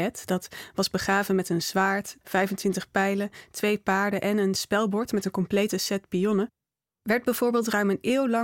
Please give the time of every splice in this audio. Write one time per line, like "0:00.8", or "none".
0:02.2